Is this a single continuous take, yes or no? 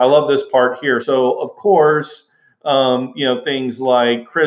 no